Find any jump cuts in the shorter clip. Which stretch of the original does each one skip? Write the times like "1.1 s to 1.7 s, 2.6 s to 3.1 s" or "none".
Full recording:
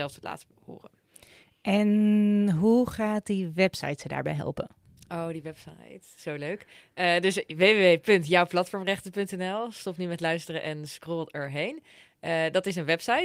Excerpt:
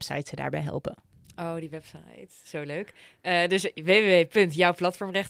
none